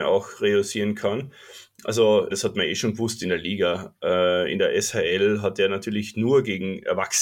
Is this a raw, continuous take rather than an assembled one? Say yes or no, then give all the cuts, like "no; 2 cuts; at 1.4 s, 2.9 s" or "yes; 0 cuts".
no; 1 cut; at 2.3 s